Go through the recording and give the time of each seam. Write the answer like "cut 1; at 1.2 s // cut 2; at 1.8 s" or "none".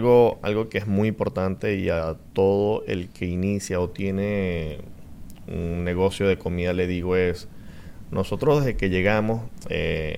cut 1; at 2.3 s